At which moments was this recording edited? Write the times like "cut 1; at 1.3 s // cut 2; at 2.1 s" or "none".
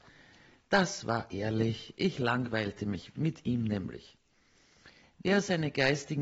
cut 1; at 3.1 s // cut 2; at 5.0 s